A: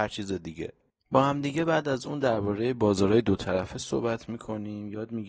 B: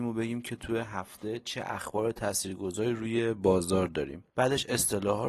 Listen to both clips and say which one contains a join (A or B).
B